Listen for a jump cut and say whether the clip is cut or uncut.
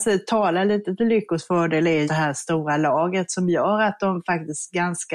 cut